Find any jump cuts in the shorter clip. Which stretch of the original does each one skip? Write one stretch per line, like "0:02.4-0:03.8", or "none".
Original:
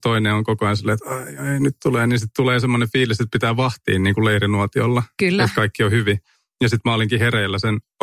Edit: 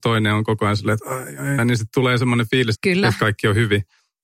0:01.6-0:02.0
0:03.2-0:05.1